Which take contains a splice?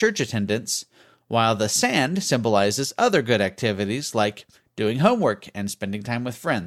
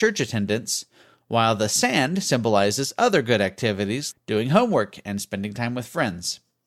second; 1 cut; at 4.1 s

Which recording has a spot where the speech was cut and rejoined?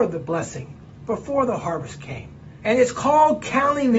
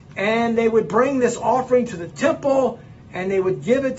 first; 1 cut; at 2.6 s

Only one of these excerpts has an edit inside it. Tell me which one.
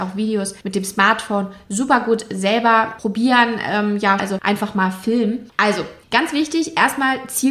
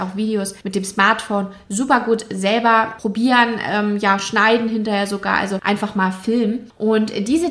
first; 2 cuts; at 4.2 s, 5.5 s

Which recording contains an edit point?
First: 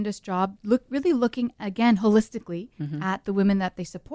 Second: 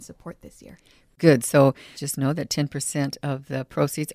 second; 1 cut; at 1.9 s

